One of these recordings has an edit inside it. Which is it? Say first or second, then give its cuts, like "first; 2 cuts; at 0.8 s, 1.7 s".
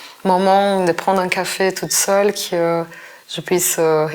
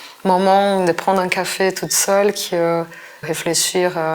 second; 1 cut; at 3.2 s